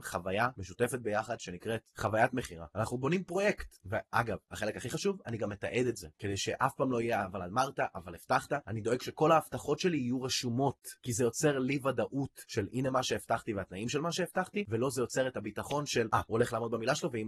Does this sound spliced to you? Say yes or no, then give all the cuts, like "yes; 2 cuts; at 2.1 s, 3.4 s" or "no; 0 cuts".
no; 0 cuts